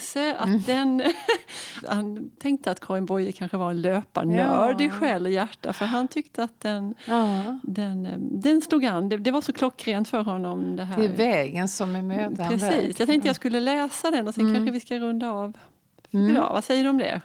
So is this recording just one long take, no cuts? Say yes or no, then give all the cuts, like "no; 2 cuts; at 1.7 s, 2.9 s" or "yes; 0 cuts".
no; 1 cut; at 1.8 s